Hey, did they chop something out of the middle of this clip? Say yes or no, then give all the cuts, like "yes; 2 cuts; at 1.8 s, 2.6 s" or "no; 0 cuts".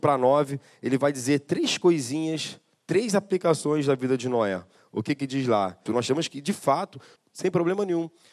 yes; 2 cuts; at 5.9 s, 7.2 s